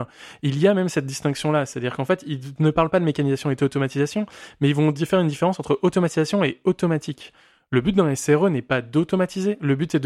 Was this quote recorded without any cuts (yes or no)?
yes